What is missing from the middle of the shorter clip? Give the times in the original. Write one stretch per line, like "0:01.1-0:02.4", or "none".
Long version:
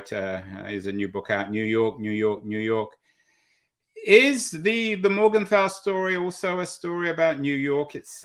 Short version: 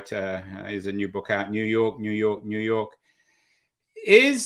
none